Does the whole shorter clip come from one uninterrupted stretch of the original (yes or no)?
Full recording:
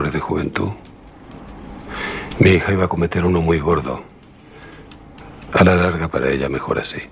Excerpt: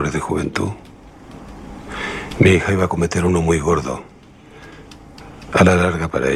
yes